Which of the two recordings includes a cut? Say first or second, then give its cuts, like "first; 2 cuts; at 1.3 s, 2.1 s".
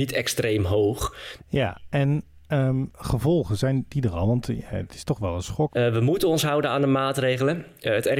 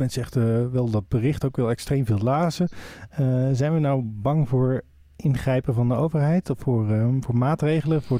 first; 2 cuts; at 1.4 s, 5.7 s